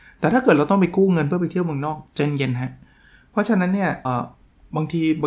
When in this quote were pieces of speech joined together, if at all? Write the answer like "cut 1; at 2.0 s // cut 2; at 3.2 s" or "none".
cut 1; at 4.0 s